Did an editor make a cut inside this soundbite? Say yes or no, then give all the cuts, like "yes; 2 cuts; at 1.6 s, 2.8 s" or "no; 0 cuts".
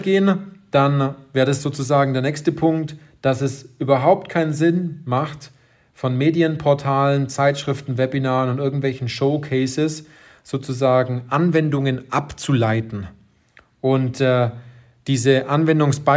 no; 0 cuts